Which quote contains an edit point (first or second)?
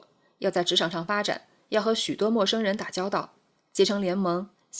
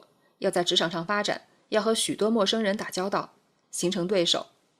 second